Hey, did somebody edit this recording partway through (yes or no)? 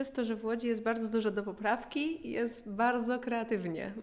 no